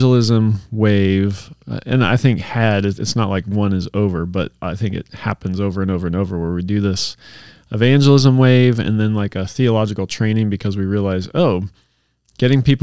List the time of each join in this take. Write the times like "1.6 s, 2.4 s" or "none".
none